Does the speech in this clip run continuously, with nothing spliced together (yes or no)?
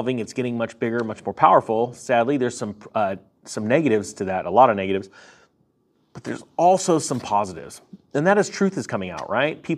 yes